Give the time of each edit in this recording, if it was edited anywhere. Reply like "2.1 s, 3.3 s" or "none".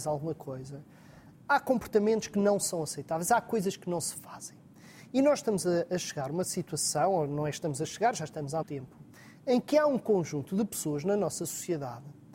8.6 s